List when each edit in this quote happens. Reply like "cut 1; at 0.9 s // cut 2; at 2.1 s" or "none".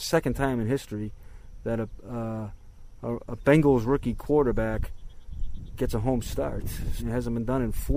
cut 1; at 7.0 s